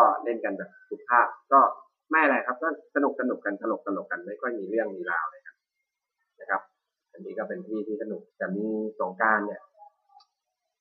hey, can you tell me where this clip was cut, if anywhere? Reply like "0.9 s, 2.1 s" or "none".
8.3 s

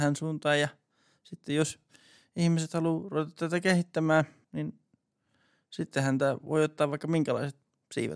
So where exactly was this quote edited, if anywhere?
4.4 s

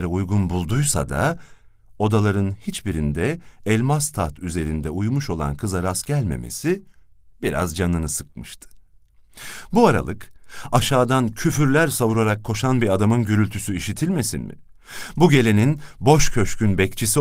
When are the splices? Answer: none

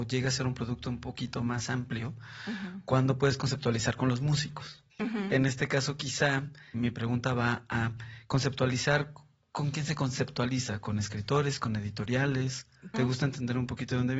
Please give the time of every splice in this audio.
4.9 s, 6.7 s, 12.9 s

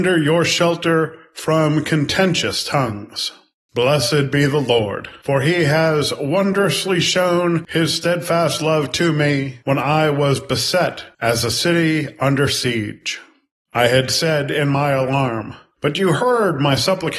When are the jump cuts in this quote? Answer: 15.7 s

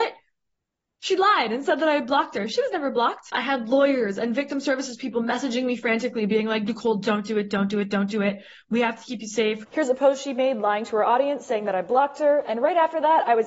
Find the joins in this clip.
none

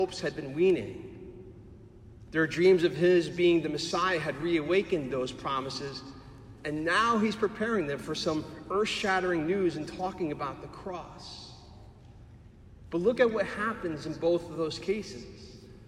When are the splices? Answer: 2.3 s

